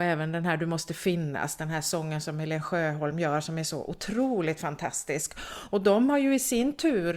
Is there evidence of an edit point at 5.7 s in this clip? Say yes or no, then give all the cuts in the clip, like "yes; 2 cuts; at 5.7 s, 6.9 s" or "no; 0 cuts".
no; 0 cuts